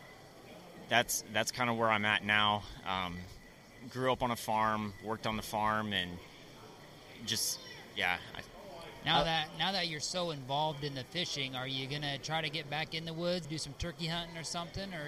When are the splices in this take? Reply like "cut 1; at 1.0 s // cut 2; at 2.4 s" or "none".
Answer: cut 1; at 13.4 s